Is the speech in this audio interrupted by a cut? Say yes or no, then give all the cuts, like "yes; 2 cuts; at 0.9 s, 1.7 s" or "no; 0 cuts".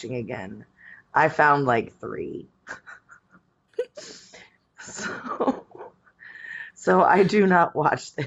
no; 0 cuts